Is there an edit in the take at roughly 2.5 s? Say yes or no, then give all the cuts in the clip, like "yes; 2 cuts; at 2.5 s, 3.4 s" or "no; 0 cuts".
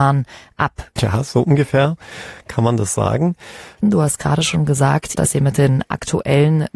no; 3 cuts; at 1.0 s, 3.8 s, 5.1 s